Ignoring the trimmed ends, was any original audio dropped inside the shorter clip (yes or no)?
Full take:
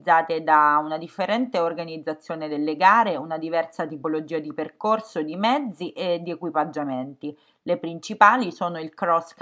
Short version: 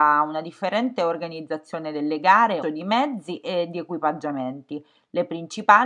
yes